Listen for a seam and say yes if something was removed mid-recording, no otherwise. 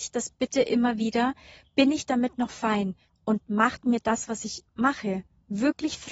yes